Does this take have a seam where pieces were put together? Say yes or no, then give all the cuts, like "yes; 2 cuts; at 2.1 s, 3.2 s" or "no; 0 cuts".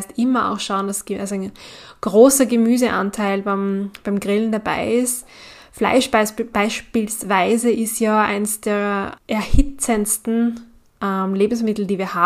yes; 1 cut; at 9.2 s